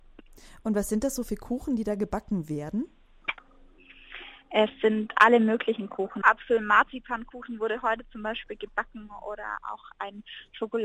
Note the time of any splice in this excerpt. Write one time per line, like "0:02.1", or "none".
0:06.2